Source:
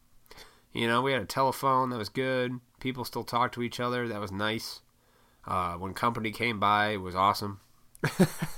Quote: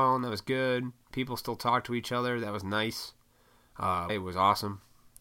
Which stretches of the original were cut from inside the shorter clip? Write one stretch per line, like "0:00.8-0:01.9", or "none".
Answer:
0:05.8-0:06.9